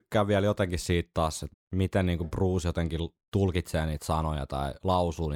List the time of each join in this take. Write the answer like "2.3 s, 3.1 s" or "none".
1.5 s